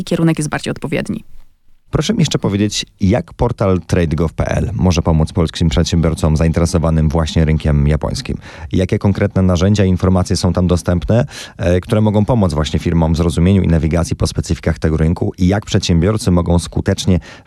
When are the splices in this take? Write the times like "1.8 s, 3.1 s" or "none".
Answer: none